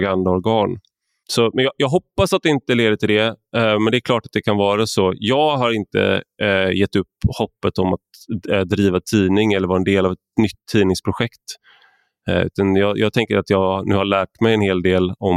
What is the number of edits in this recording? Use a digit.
1